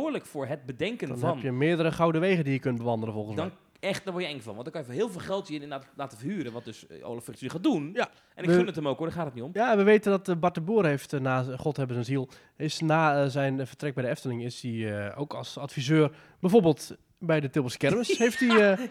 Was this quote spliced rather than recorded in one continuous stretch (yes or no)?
yes